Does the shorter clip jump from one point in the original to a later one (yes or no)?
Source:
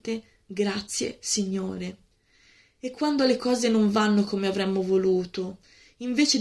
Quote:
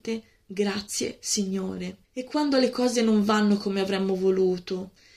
yes